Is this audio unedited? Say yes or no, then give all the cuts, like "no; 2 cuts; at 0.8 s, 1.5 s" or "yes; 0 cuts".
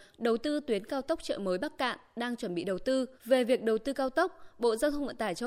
no; 1 cut; at 3.2 s